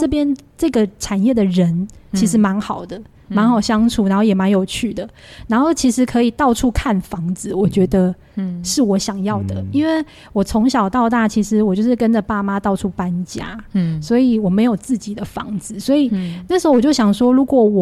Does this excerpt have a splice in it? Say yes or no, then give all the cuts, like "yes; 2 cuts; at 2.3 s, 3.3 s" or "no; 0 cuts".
no; 0 cuts